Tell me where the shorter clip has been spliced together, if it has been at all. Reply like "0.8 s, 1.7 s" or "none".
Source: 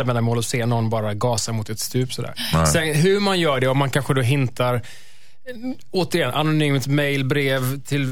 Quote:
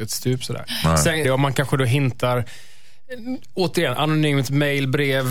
1.2 s